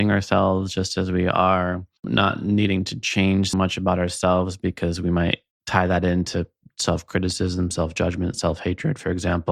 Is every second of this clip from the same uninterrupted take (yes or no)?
no